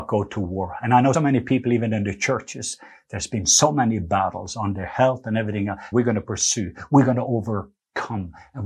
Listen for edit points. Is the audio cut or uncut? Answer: cut